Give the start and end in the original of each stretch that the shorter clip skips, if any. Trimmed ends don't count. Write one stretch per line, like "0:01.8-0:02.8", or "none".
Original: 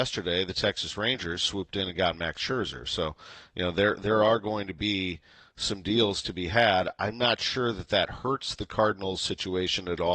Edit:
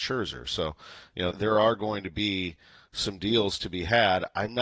0:03.7-0:04.0